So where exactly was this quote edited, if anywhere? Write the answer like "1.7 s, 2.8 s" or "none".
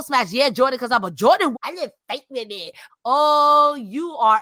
1.5 s, 2.9 s